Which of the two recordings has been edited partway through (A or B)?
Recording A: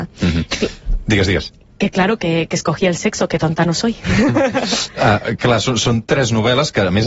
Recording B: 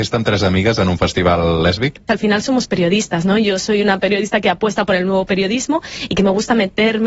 B